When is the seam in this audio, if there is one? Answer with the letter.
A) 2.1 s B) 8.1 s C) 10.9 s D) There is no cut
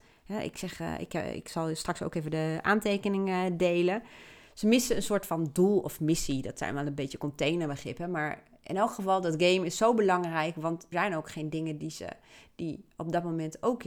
C